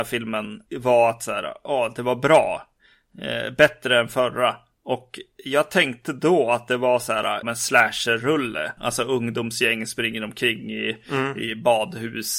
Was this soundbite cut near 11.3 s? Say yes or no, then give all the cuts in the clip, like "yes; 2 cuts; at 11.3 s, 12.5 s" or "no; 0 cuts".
no; 2 cuts; at 7.4 s, 8.8 s